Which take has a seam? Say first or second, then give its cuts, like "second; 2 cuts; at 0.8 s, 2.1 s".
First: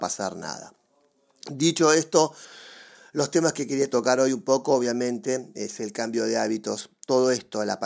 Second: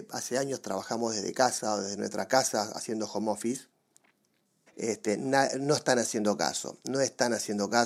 second; 1 cut; at 4.7 s